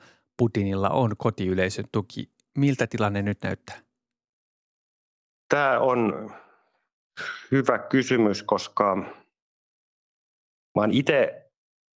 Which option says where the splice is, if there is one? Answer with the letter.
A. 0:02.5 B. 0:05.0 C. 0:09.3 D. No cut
D